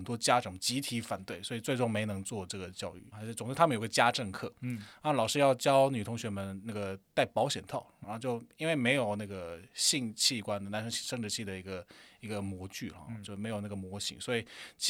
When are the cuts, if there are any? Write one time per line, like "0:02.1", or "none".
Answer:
0:03.1
0:08.0